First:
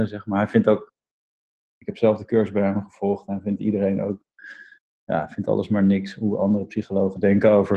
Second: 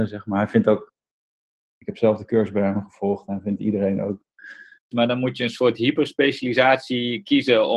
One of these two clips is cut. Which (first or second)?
second